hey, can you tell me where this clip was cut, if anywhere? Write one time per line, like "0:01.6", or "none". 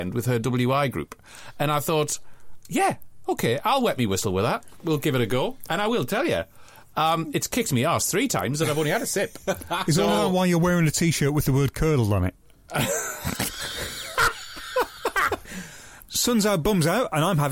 0:16.0